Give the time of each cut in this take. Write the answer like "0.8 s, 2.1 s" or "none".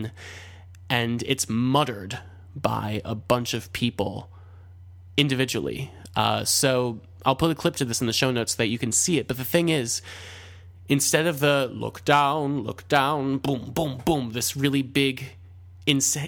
none